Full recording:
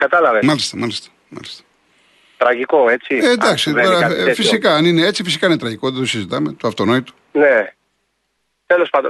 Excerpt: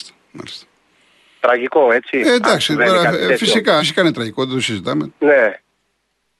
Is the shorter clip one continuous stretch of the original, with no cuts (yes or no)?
no